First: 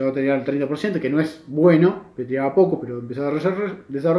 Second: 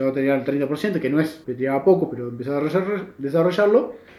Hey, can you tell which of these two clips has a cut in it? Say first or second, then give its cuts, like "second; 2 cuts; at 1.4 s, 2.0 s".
second; 1 cut; at 1.4 s